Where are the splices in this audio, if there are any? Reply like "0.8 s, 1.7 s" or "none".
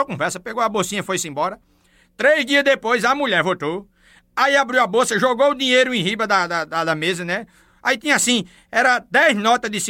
none